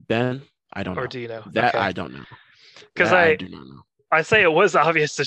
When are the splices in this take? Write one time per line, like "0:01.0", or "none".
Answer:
none